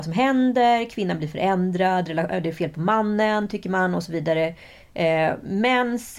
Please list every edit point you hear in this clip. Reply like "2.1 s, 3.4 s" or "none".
none